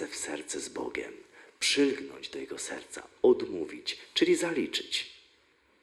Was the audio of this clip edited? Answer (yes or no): no